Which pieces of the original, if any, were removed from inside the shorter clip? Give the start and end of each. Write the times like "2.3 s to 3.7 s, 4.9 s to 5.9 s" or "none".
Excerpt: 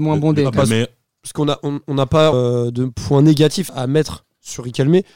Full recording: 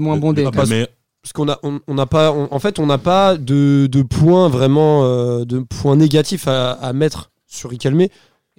2.3 s to 5.1 s, 6.4 s to 6.7 s